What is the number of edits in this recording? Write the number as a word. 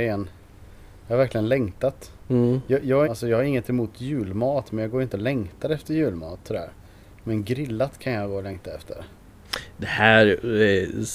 one